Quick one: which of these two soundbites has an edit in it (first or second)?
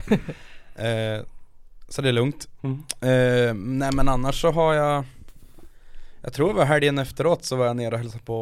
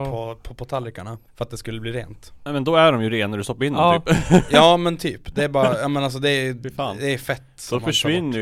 second